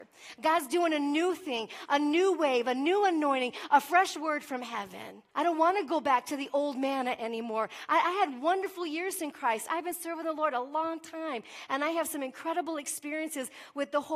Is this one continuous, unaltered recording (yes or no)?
no